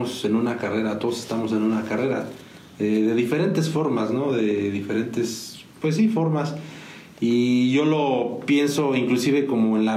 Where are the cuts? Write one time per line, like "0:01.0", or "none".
0:05.7